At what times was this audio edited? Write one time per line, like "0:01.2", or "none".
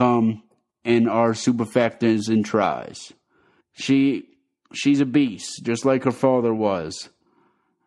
0:03.6